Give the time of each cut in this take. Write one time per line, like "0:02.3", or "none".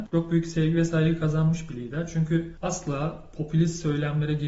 none